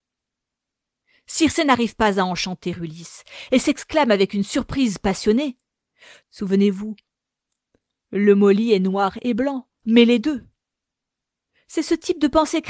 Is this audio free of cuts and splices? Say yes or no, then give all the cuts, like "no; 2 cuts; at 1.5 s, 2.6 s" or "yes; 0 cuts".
no; 2 cuts; at 6.2 s, 9.8 s